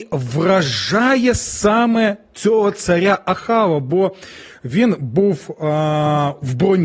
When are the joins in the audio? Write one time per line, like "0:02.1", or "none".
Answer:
none